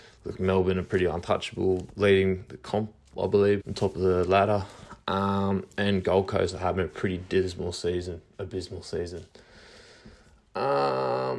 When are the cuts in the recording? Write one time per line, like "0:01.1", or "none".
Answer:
0:03.6